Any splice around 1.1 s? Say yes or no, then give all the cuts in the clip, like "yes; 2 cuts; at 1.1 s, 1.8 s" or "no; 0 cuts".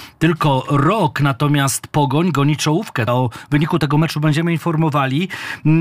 no; 1 cut; at 3.1 s